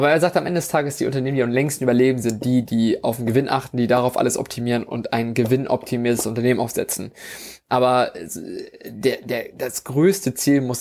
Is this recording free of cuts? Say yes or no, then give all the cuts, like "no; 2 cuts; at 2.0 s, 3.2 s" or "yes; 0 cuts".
no; 1 cut; at 7.6 s